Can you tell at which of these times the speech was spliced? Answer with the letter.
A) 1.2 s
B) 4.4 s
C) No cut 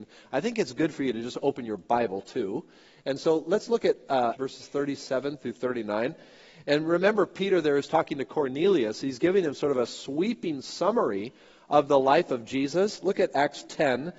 B